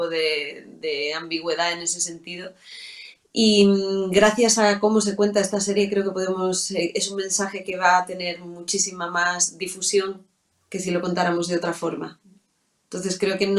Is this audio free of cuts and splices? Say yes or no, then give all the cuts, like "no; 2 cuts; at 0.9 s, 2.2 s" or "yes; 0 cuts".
yes; 0 cuts